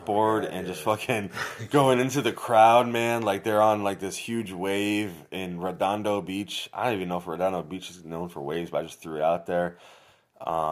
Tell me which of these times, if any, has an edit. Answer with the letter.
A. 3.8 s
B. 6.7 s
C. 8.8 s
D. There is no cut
D